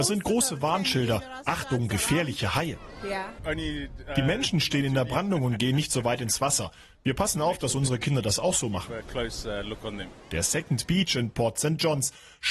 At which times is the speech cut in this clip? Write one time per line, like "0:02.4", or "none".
0:10.2